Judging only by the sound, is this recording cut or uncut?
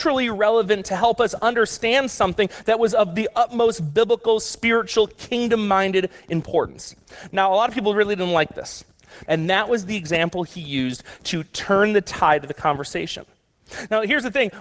cut